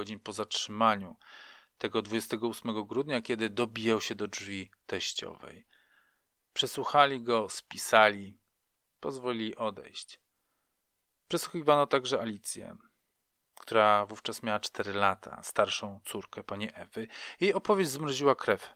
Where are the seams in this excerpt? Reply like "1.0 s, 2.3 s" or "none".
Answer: none